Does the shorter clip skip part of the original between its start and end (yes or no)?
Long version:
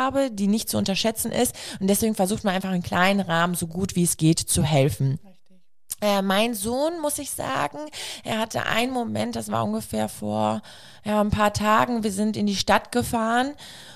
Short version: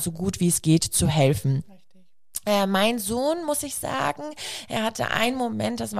no